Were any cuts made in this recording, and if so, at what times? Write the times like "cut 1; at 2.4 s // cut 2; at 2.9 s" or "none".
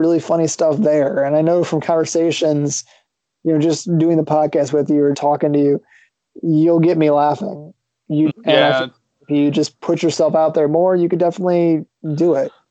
cut 1; at 5.1 s // cut 2; at 8.3 s